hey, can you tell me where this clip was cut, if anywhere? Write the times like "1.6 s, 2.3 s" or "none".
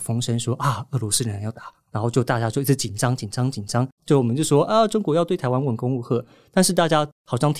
4.0 s